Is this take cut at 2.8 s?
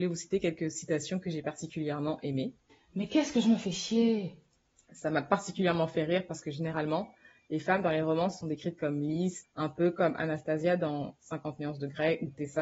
no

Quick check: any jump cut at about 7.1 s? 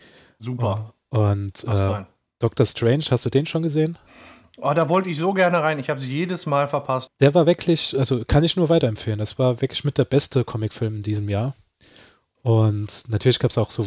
yes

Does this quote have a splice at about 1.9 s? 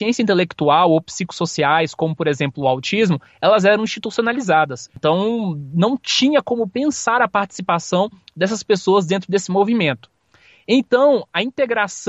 no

